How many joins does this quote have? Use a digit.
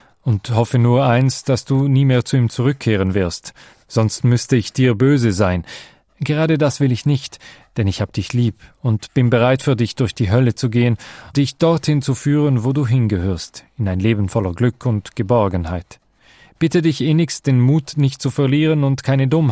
1